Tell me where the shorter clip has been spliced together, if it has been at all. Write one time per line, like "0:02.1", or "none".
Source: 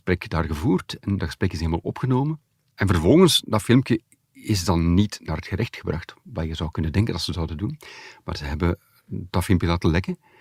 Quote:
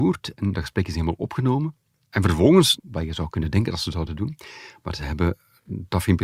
0:02.8